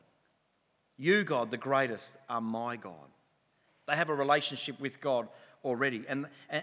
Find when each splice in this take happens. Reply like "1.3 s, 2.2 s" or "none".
3.7 s